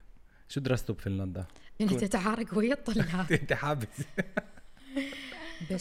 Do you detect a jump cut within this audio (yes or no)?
yes